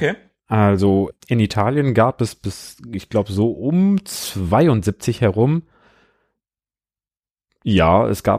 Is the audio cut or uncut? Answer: uncut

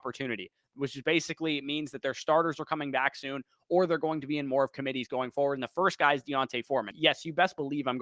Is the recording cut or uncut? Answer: cut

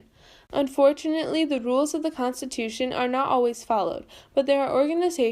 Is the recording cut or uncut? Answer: uncut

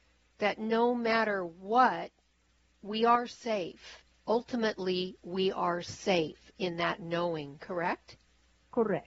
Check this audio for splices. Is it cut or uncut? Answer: uncut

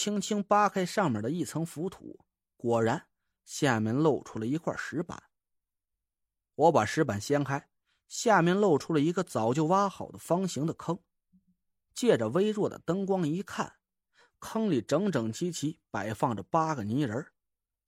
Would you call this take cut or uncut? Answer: uncut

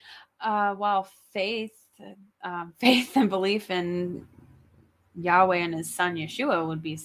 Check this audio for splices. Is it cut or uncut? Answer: uncut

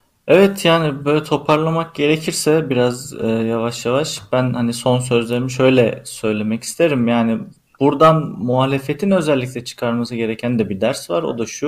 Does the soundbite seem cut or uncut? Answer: uncut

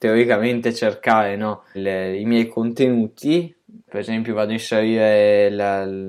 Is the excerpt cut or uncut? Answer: cut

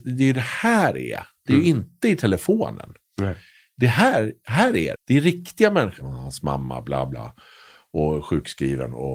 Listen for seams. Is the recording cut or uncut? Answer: cut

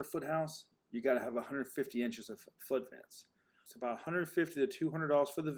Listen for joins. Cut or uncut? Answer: cut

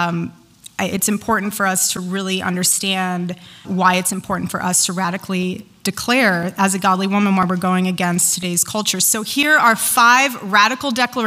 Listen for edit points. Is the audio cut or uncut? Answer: cut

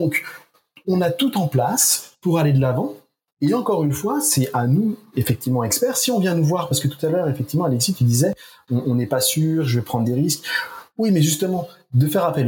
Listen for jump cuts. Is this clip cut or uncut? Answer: uncut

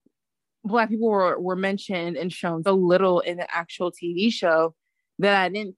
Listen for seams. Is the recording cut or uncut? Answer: cut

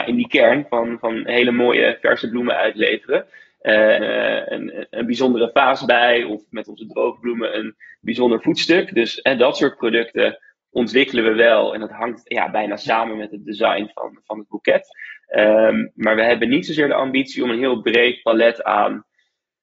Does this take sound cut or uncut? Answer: cut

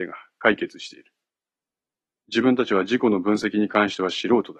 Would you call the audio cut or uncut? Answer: uncut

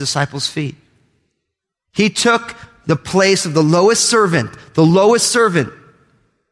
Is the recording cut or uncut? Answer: uncut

